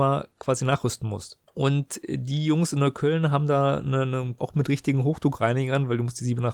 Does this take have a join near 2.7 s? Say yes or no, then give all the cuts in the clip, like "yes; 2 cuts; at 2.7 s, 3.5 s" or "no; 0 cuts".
no; 2 cuts; at 1.5 s, 4.4 s